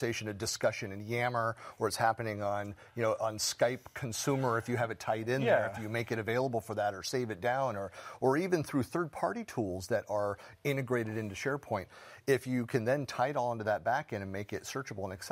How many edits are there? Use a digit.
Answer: 1